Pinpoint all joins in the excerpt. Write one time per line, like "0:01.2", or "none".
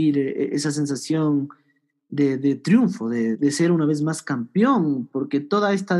0:03.3